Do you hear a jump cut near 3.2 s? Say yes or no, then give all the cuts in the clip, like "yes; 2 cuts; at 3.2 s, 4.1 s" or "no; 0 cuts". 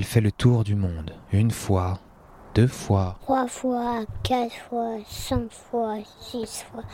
no; 0 cuts